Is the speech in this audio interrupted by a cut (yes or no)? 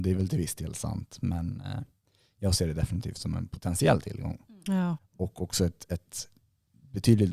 yes